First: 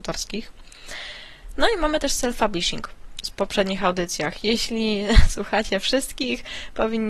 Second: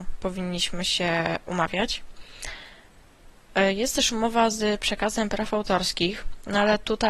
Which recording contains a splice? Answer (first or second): first